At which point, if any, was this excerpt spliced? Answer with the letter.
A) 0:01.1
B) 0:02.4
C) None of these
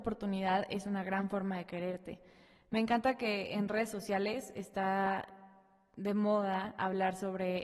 C